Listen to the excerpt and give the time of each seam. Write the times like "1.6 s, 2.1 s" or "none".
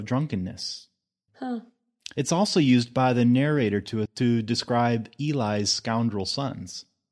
1.3 s, 4.0 s